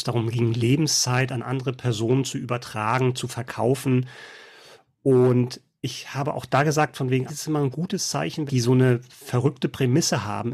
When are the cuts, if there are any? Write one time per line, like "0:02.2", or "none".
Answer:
0:07.3
0:08.5